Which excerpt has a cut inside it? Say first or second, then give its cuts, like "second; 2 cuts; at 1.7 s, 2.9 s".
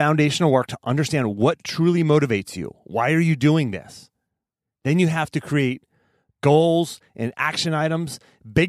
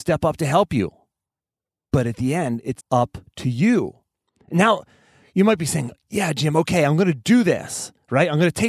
second; 1 cut; at 2.8 s